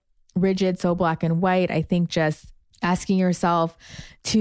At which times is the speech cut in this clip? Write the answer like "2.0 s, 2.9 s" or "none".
none